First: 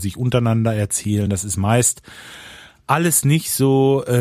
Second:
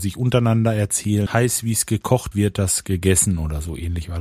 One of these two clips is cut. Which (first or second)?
second